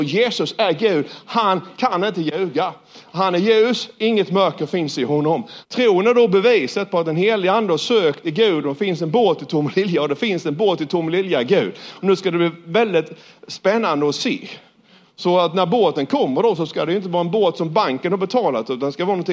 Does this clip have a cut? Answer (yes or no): yes